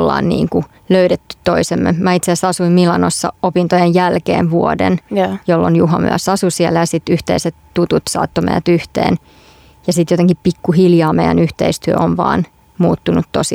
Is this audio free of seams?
yes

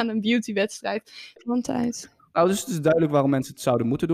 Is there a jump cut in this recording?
yes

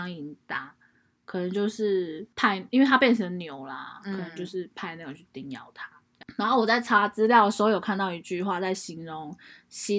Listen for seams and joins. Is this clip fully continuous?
yes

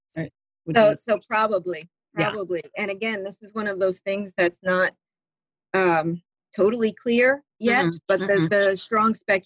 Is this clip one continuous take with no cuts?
yes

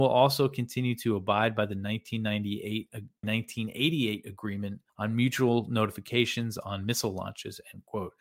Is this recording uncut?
no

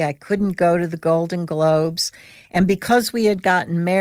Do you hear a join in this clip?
no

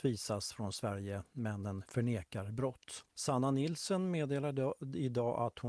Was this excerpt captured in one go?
no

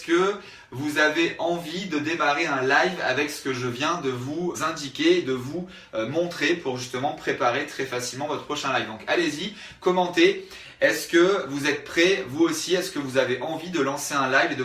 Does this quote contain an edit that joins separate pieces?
yes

